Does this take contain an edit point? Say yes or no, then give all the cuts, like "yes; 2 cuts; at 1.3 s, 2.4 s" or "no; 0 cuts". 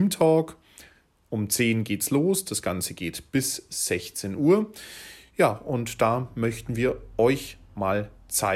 no; 0 cuts